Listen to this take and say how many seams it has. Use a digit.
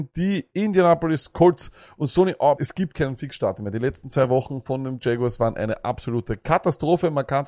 1